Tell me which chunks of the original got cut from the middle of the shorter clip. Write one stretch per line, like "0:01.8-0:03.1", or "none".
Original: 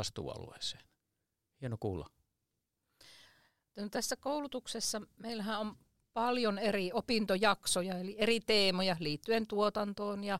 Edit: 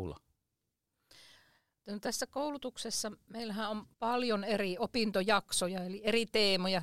0:05.8-0:06.1